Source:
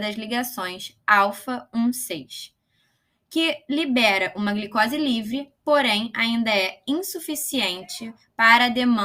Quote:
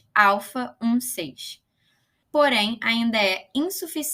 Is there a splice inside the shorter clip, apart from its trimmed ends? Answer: yes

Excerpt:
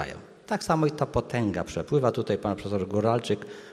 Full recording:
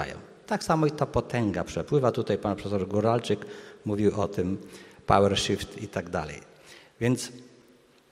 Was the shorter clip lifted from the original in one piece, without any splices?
yes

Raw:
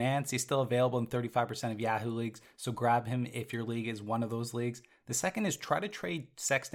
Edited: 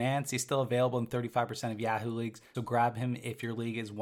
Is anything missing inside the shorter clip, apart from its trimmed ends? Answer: yes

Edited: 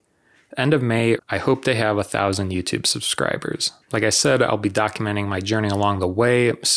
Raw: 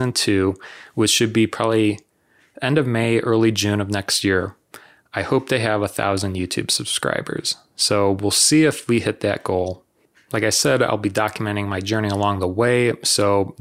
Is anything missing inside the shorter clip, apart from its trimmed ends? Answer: yes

